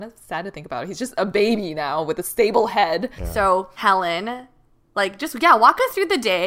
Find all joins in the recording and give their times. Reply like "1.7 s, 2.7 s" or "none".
3.2 s